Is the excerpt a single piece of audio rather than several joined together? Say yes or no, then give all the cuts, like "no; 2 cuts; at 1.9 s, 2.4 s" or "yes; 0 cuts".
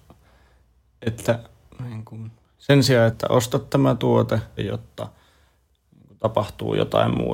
no; 2 cuts; at 3.1 s, 4.6 s